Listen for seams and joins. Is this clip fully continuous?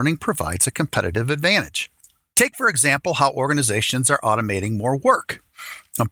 yes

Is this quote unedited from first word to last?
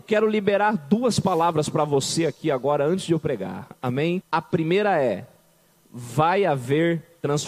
no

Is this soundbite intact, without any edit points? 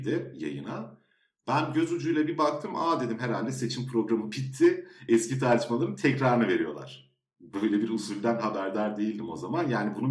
yes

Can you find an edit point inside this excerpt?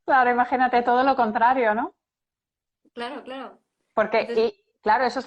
no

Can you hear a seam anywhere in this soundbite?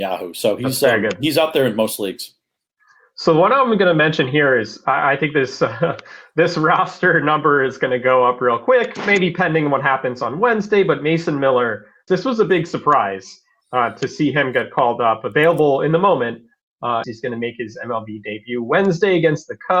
yes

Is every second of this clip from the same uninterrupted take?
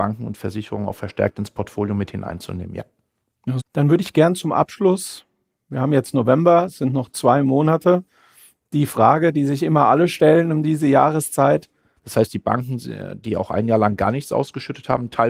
no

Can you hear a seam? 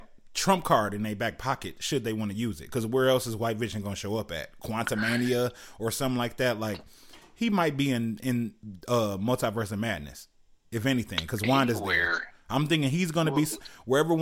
no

